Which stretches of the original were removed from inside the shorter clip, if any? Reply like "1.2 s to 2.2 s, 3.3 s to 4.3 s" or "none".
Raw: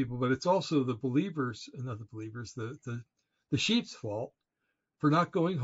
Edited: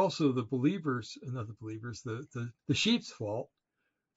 3.1 s to 3.4 s